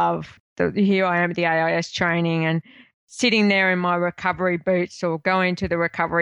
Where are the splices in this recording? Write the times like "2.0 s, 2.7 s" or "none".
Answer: none